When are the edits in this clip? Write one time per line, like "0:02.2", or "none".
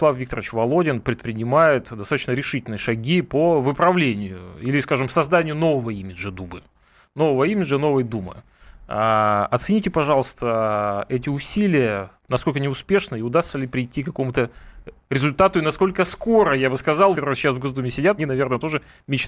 0:12.2
0:17.1
0:18.2

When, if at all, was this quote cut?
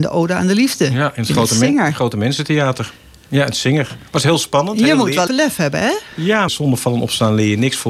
0:05.3
0:06.5

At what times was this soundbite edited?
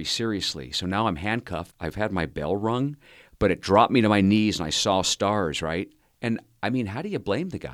0:01.7

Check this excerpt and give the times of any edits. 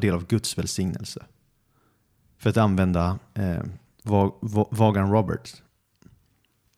0:03.9

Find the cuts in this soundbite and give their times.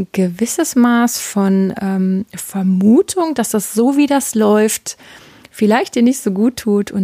none

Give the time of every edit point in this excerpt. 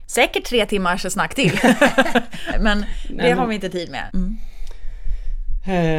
0:02.5
0:04.1

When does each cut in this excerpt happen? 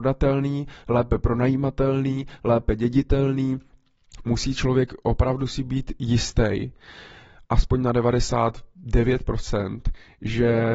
0:04.2

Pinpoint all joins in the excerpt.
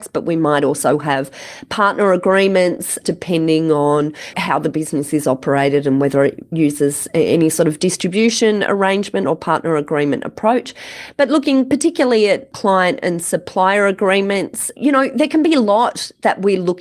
0:04.3

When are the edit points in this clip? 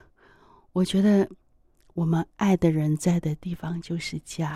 none

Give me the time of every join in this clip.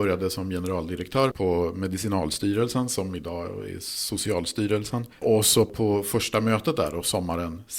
0:01.3

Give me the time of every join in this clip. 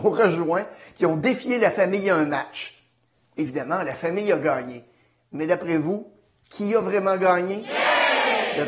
none

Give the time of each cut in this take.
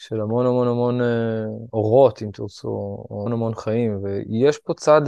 0:03.3

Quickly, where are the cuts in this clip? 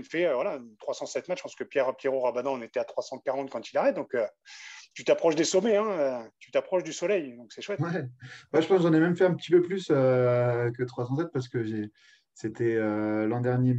none

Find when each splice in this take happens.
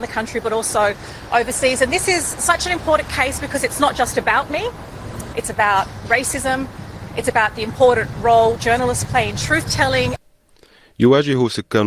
0:05.3

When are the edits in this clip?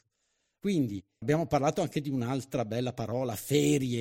0:01.2

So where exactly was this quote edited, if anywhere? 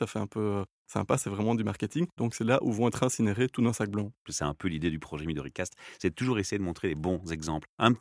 0:02.2
0:04.3

